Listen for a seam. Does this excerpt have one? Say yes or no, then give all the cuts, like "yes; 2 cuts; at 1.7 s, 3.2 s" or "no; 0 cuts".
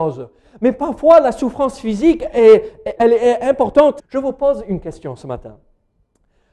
yes; 2 cuts; at 3.0 s, 4.0 s